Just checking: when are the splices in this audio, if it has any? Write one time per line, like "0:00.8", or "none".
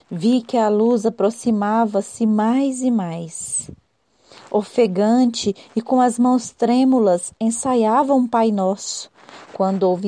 none